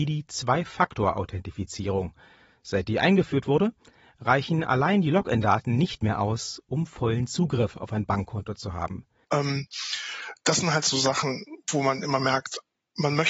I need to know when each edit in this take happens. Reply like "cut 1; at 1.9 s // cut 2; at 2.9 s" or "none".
cut 1; at 9.2 s // cut 2; at 10.9 s

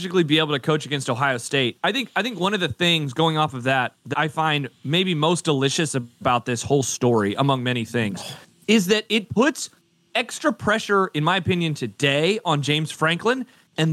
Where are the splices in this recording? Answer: cut 1; at 4.1 s

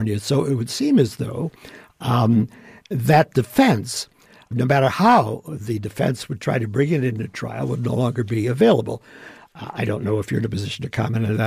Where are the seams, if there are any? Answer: cut 1; at 4.5 s

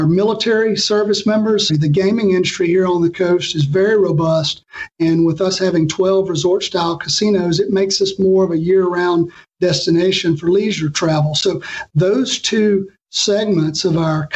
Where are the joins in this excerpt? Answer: cut 1; at 1.7 s

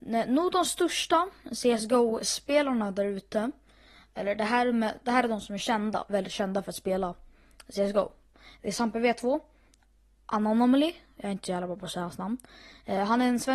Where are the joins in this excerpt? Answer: none

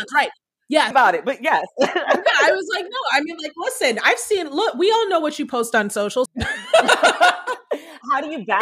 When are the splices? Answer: cut 1; at 0.9 s // cut 2; at 6.3 s

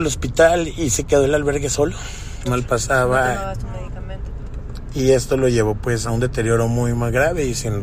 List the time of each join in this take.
cut 1; at 2.4 s // cut 2; at 6.0 s

